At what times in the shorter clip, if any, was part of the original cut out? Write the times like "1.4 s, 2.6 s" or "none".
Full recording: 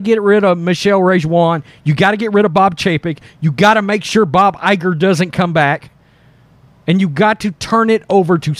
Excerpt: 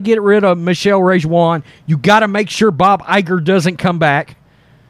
1.8 s